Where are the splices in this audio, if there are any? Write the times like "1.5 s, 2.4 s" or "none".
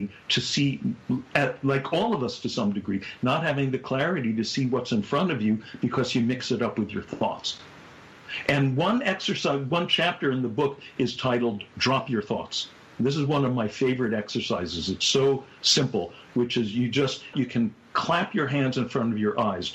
17.3 s